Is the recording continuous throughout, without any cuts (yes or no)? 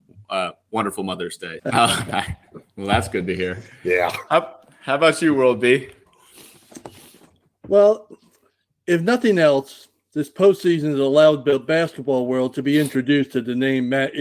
no